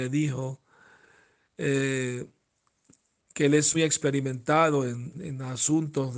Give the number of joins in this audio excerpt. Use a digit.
2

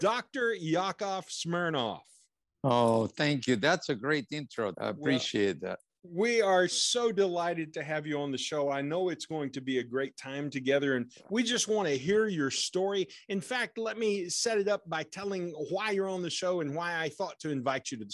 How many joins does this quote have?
1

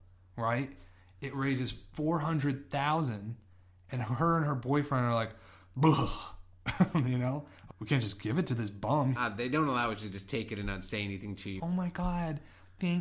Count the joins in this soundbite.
3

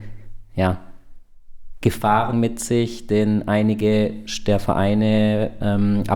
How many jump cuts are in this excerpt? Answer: 1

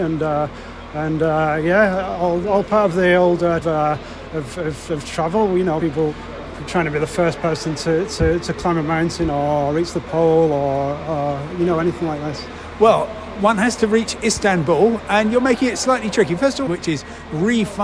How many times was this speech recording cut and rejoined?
2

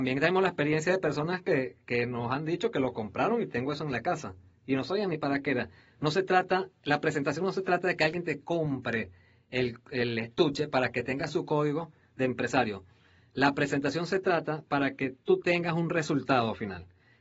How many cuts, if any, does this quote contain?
0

